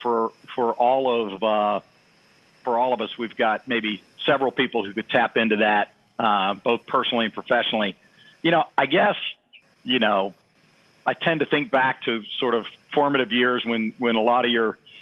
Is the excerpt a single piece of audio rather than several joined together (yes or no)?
no